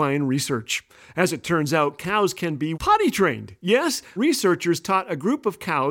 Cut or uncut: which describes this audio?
cut